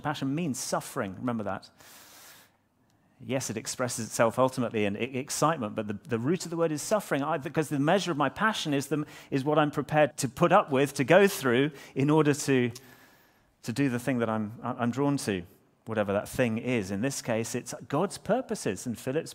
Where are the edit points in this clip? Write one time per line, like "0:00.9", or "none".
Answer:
0:10.1